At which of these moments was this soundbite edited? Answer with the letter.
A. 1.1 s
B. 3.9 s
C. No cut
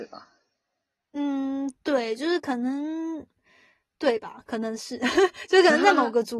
C